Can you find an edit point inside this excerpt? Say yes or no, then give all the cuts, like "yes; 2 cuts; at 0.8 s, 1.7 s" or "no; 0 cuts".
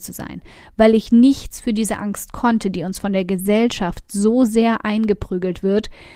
no; 0 cuts